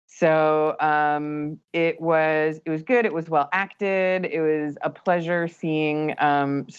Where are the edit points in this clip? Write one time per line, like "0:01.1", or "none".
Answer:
none